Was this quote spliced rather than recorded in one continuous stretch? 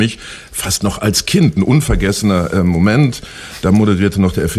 no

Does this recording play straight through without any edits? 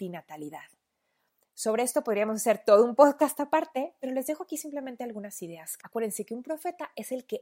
no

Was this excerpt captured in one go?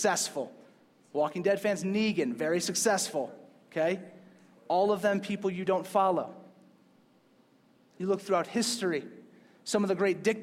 yes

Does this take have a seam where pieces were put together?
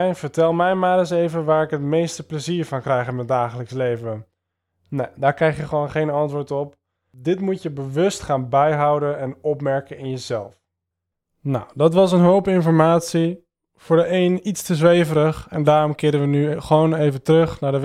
no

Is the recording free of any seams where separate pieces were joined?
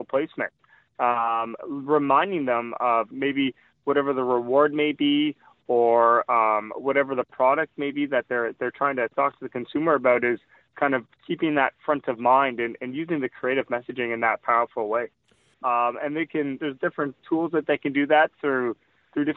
no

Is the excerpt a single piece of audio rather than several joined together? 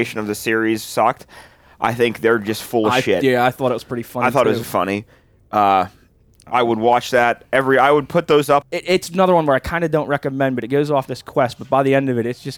no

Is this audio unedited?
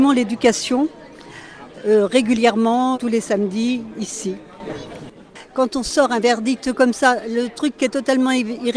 no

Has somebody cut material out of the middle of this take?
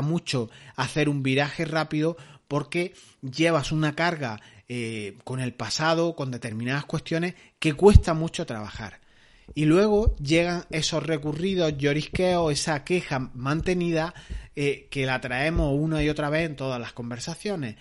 no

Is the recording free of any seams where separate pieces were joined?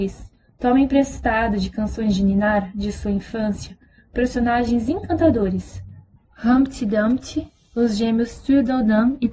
yes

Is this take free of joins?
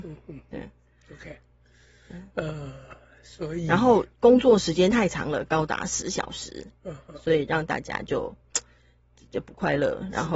yes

